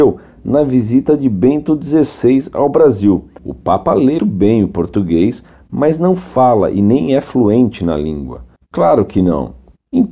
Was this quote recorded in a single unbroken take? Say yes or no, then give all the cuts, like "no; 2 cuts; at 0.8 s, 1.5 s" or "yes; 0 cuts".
no; 2 cuts; at 4.2 s, 8.6 s